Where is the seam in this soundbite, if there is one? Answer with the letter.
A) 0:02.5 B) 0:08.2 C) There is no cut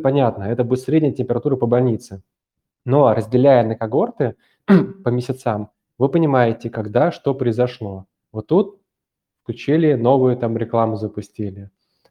C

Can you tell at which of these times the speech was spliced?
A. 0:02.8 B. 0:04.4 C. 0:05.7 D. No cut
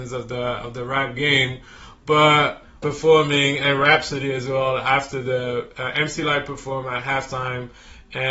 A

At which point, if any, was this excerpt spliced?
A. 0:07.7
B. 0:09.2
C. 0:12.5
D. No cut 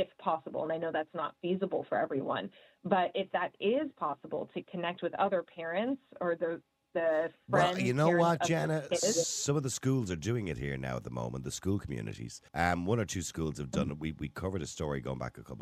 C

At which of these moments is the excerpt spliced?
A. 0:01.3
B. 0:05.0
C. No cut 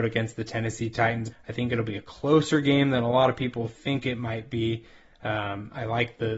A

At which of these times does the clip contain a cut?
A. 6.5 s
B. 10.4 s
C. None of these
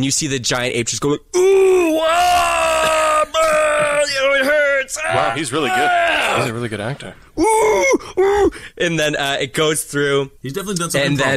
B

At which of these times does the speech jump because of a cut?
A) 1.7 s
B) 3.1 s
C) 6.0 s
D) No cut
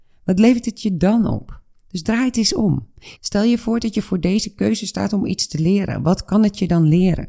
B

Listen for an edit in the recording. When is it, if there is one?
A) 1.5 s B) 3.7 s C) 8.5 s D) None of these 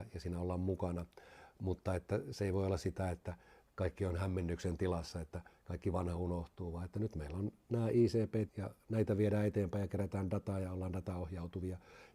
C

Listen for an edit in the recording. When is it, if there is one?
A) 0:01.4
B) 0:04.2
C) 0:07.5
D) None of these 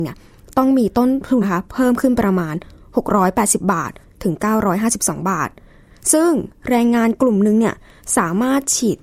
A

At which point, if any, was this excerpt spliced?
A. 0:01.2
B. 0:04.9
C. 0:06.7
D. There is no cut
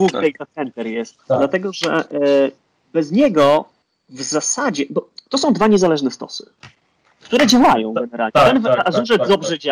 A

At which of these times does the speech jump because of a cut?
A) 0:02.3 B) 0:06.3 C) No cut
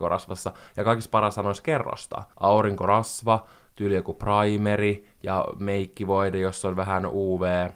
C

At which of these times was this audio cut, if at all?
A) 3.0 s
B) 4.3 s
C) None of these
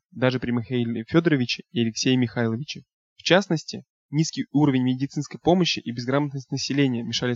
A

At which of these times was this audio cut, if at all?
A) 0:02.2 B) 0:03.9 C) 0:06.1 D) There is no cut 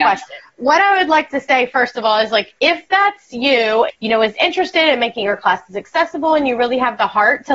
B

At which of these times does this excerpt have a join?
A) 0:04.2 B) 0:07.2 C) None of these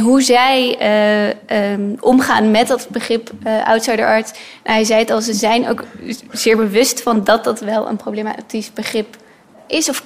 C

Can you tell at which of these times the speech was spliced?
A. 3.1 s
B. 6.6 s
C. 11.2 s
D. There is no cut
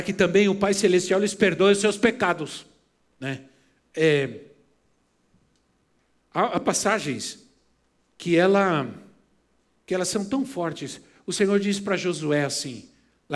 A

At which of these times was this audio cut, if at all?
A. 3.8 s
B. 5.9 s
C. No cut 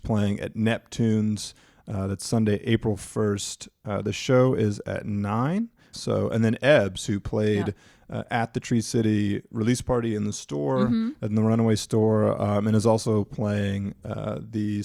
B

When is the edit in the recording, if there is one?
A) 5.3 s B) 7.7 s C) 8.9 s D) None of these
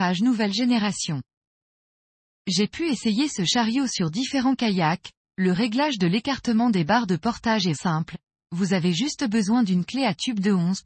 B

